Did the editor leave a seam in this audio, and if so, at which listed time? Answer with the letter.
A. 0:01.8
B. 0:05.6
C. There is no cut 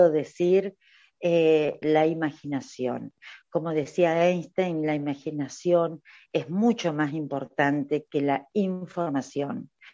A